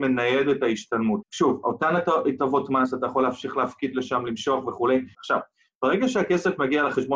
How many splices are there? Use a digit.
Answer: 2